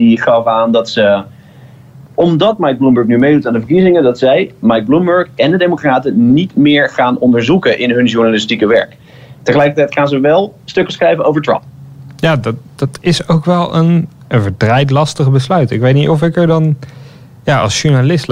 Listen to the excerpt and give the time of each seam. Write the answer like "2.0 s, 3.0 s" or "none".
none